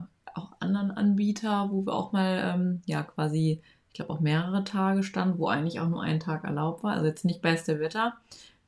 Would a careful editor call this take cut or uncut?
uncut